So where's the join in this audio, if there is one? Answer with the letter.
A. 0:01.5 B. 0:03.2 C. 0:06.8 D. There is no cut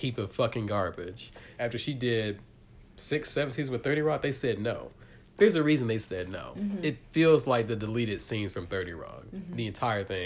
A